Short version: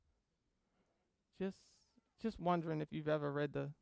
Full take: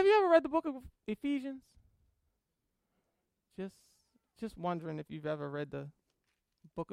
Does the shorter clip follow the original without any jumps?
yes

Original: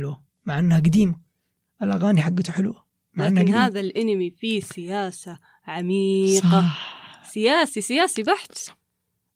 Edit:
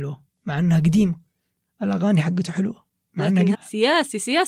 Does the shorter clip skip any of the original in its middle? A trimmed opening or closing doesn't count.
yes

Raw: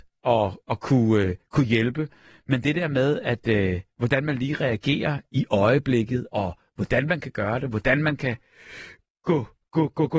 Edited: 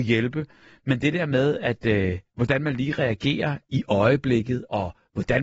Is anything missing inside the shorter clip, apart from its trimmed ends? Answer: no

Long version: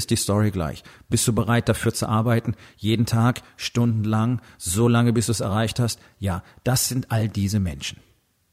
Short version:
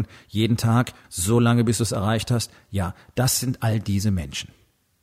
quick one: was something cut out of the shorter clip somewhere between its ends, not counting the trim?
yes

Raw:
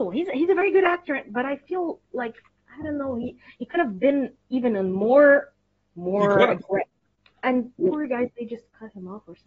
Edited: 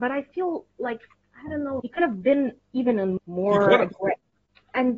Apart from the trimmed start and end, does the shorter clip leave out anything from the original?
yes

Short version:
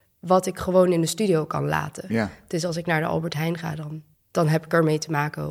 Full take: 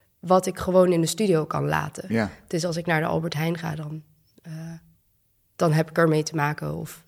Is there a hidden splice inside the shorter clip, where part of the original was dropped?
yes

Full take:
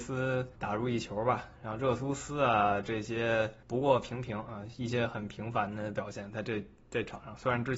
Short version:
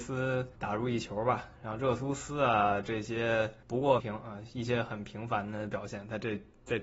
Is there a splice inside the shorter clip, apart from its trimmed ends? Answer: yes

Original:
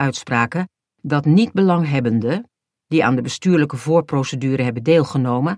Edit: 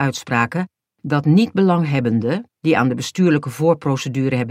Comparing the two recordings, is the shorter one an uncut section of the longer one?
no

